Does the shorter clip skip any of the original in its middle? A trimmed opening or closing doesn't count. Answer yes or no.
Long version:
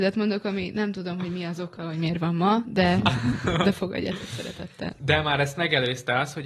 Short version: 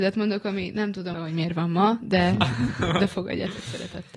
yes